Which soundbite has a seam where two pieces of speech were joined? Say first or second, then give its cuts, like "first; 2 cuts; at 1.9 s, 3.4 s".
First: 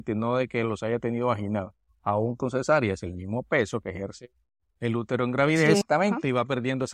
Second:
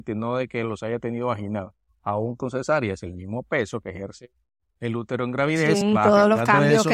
first; 1 cut; at 5.8 s